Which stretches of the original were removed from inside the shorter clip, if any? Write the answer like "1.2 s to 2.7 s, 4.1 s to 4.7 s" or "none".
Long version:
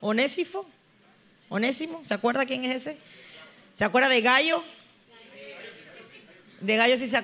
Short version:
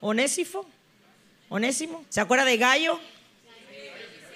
2.0 s to 3.7 s